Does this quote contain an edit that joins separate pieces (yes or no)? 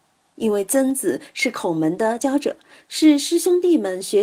yes